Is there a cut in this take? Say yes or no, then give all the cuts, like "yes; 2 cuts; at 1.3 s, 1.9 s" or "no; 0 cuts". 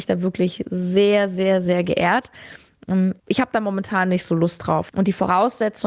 yes; 2 cuts; at 3.2 s, 4.9 s